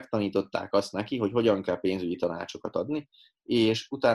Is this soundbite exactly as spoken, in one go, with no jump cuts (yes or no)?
yes